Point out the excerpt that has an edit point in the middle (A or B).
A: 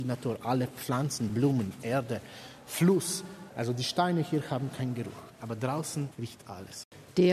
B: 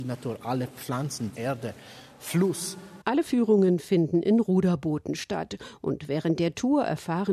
B